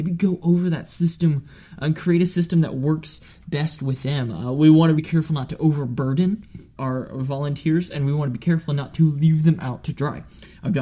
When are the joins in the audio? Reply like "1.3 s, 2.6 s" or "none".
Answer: 5.0 s, 6.8 s